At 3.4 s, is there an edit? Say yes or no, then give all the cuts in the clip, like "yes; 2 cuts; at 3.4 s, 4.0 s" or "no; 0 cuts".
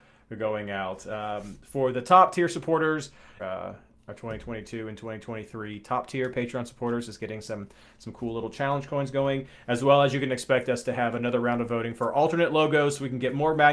yes; 1 cut; at 3.4 s